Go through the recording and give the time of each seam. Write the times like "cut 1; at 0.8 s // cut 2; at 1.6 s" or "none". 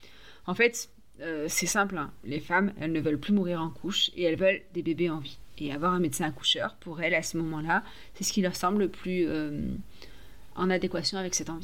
none